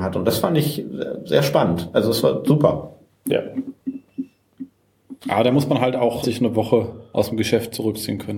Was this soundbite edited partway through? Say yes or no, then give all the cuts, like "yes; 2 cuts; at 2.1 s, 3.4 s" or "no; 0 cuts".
yes; 2 cuts; at 5.2 s, 6.2 s